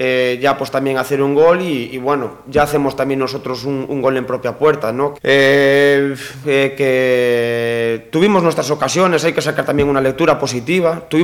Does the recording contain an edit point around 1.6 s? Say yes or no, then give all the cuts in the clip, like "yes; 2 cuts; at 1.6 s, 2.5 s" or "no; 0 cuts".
no; 2 cuts; at 5.1 s, 6.4 s